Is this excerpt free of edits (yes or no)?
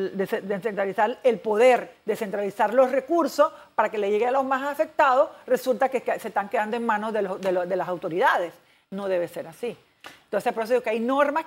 yes